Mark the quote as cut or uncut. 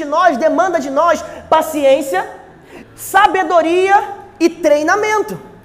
cut